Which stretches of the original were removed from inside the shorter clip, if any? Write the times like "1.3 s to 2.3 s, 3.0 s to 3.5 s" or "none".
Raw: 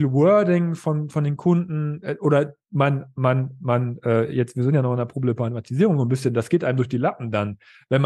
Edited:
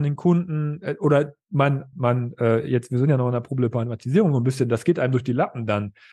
3.1 s to 3.6 s